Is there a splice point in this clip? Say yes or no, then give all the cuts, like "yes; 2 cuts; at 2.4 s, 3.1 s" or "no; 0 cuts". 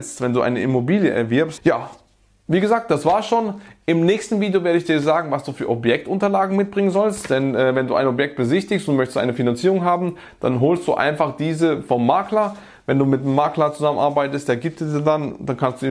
yes; 1 cut; at 1.6 s